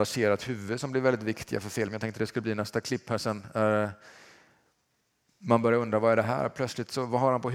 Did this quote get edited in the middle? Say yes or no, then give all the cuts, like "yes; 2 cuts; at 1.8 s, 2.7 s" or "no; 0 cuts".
no; 0 cuts